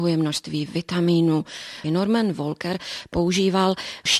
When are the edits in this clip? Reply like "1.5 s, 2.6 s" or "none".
1.8 s